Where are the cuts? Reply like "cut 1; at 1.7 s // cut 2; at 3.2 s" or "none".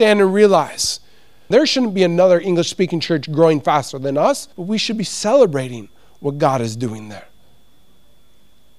cut 1; at 1.5 s // cut 2; at 4.5 s